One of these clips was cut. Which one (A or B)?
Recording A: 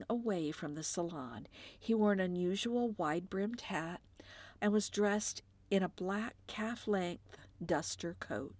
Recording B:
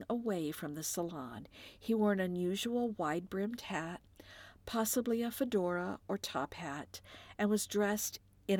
A